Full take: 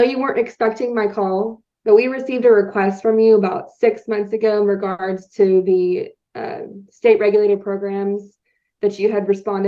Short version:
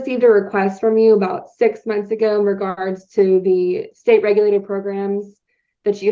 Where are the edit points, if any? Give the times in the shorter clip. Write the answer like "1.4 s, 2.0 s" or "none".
3.9 s